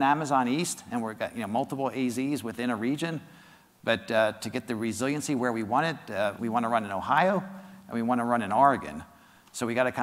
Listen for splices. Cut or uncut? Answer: cut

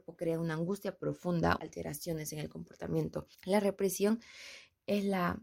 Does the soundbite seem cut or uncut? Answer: cut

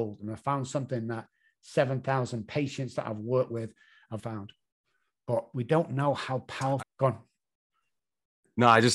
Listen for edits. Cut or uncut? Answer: cut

